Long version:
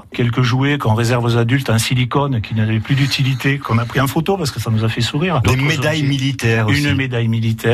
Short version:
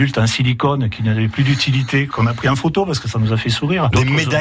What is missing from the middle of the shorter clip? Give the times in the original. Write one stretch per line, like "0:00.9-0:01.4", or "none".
none